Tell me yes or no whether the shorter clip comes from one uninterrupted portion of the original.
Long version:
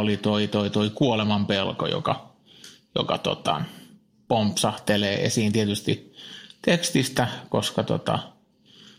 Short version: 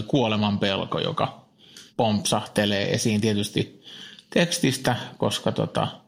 no